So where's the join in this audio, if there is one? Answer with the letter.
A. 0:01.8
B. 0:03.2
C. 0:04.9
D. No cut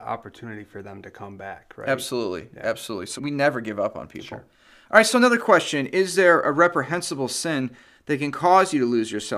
B